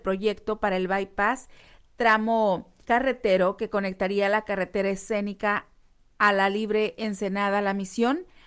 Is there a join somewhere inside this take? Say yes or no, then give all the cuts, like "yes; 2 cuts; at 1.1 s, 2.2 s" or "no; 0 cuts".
yes; 1 cut; at 2.8 s